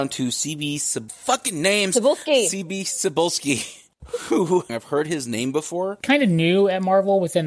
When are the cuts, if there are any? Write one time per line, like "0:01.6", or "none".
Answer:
0:04.7
0:06.0